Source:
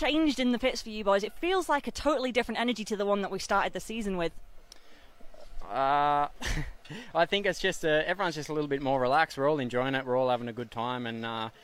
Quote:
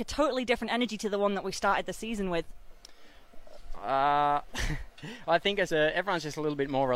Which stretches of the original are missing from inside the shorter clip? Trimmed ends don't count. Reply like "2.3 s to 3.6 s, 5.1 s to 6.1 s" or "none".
7.5 s to 7.8 s